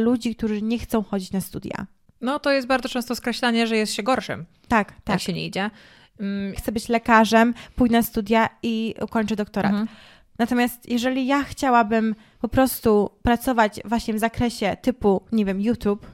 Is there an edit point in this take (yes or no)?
yes